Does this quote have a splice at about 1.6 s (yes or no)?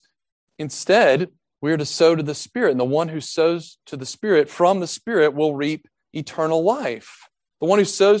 yes